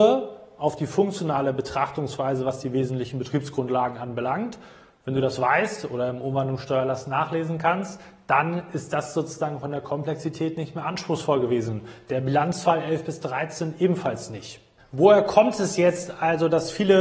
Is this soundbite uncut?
yes; 0 cuts

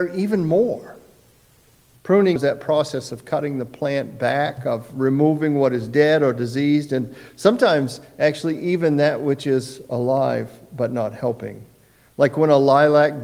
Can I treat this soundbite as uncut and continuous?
no; 1 cut; at 2.4 s

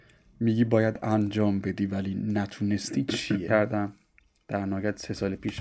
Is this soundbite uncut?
no; 1 cut; at 3.5 s

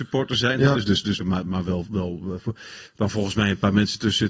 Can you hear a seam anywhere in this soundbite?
yes; 2 cuts; at 1.2 s, 2.9 s

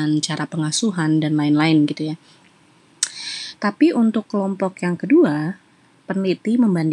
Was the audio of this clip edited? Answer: yes; 1 cut; at 3.5 s

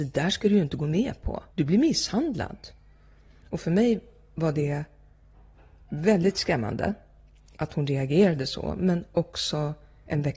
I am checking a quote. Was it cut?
yes; 2 cuts; at 1.5 s, 7.5 s

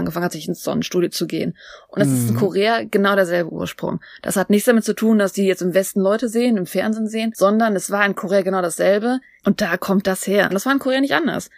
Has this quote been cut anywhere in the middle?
yes; 2 cuts; at 9.4 s, 10.5 s

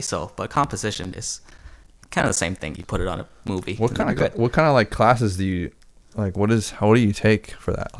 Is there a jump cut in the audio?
yes; 1 cut; at 2.8 s

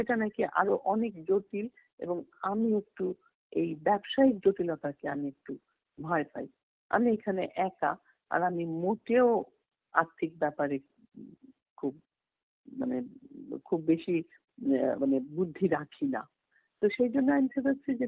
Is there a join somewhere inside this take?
no; 0 cuts

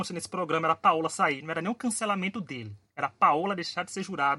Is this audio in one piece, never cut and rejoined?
yes; 0 cuts

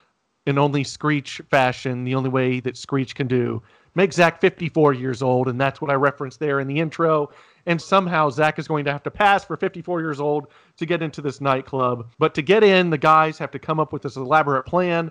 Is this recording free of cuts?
no; 2 cuts; at 7.8 s, 12.1 s

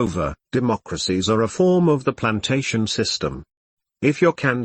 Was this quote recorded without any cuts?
yes; 0 cuts

